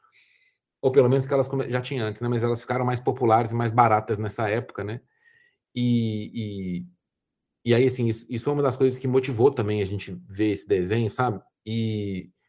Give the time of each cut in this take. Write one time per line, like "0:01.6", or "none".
none